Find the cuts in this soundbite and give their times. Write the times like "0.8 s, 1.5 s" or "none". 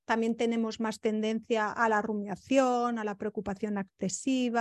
none